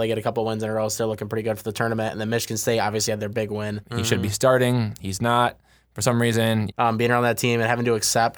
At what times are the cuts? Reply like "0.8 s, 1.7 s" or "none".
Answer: 3.8 s, 6.7 s